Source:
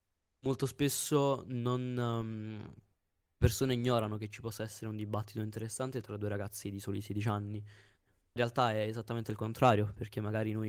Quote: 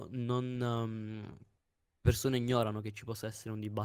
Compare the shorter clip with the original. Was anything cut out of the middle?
no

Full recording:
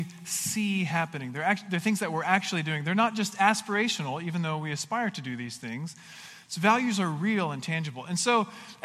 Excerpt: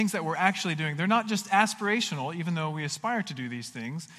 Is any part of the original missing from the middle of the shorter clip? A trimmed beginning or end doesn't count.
no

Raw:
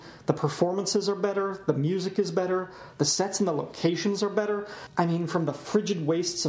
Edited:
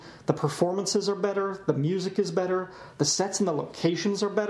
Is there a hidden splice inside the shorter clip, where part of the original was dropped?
no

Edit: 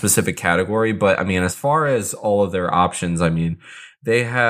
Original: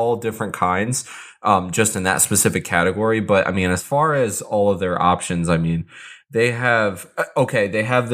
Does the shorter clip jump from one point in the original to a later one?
no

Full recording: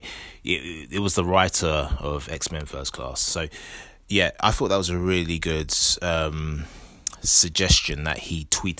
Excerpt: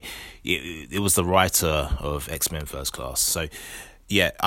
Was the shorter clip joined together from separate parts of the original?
no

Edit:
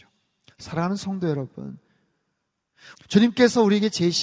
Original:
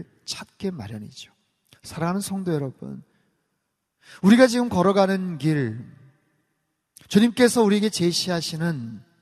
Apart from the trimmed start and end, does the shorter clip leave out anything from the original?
yes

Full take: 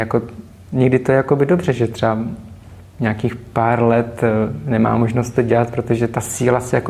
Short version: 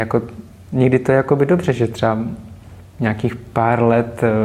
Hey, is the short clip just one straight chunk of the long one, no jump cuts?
yes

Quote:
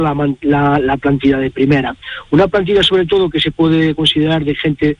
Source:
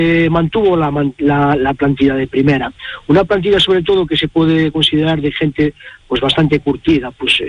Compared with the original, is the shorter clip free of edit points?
yes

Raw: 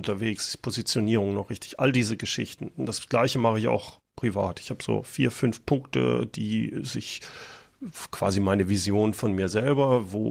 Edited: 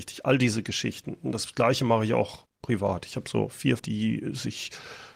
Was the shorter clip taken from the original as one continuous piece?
no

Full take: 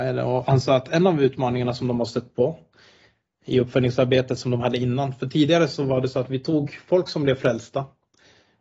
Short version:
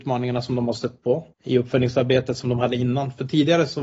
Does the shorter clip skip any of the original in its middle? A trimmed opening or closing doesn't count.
yes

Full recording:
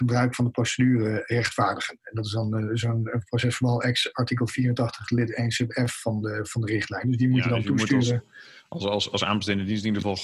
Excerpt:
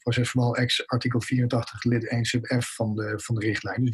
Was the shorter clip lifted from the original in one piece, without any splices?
yes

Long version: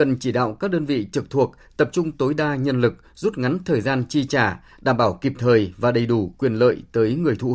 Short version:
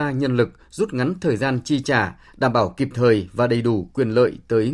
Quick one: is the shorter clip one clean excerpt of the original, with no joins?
yes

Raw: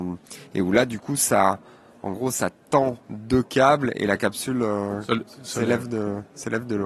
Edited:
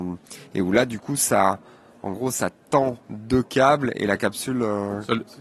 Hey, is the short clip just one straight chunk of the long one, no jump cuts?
yes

